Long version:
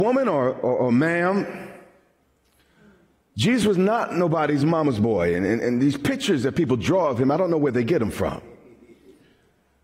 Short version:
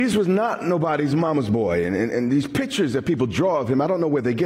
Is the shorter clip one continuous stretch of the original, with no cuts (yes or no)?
yes